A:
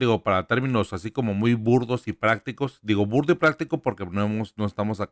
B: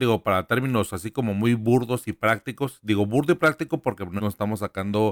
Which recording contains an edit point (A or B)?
B